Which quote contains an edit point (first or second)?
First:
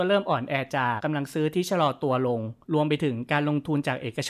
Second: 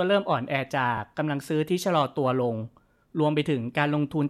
first